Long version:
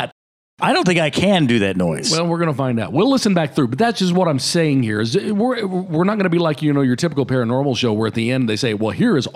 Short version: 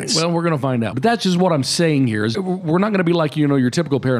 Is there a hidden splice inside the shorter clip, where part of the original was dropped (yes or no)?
yes